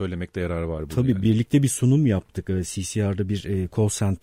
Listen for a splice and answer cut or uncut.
uncut